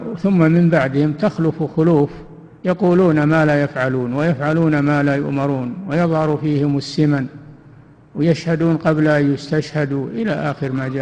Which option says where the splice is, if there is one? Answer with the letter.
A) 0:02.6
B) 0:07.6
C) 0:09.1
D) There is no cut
A